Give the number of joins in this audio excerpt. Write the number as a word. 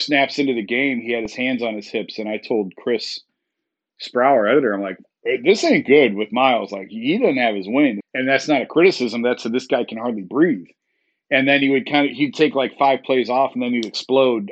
one